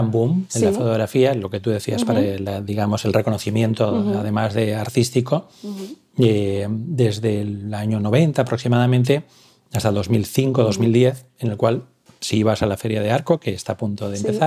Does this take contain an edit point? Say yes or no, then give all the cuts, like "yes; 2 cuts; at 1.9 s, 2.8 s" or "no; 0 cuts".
no; 0 cuts